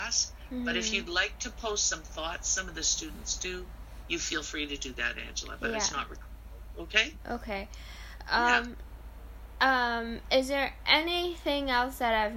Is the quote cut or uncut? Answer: uncut